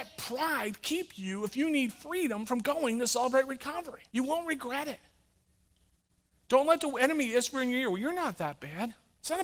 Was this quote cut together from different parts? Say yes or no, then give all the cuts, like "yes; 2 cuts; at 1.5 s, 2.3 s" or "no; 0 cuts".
yes; 1 cut; at 4.1 s